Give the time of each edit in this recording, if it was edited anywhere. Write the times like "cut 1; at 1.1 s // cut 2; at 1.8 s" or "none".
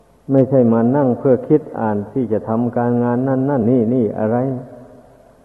cut 1; at 3.6 s